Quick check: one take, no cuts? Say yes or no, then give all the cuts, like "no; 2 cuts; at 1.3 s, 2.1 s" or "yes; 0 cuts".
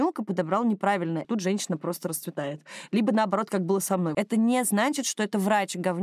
no; 2 cuts; at 1.2 s, 4.1 s